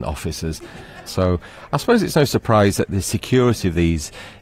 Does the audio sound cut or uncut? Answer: cut